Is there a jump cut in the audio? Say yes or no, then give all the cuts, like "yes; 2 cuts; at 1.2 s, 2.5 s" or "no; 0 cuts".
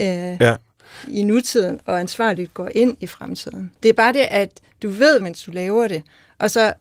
yes; 2 cuts; at 3.8 s, 5.2 s